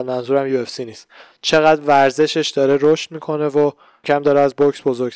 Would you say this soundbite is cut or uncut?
cut